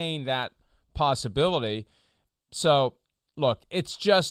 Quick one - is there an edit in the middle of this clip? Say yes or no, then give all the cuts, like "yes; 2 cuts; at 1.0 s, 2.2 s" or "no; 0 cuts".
no; 0 cuts